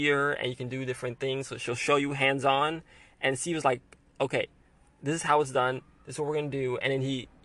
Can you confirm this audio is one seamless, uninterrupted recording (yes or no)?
yes